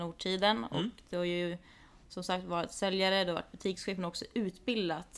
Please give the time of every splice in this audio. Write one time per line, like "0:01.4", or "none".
none